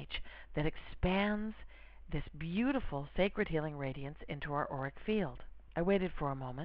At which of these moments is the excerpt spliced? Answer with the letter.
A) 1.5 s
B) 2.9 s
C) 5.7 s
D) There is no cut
C